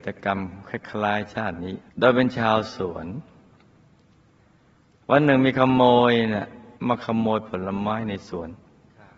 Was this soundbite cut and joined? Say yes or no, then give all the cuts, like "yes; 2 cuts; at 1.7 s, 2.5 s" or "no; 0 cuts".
yes; 2 cuts; at 1.9 s, 6.8 s